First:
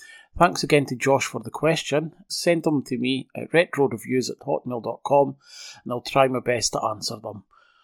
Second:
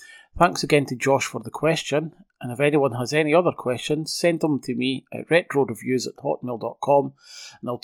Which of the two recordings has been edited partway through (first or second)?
first